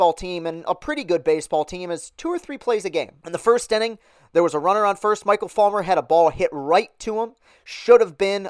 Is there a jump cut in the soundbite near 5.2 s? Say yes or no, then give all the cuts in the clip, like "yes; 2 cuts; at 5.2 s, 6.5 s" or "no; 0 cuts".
no; 1 cut; at 3.2 s